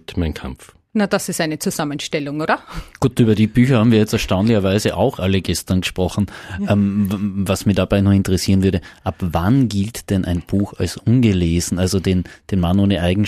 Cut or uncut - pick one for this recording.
uncut